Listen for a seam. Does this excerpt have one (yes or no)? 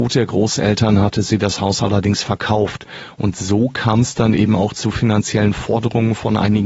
no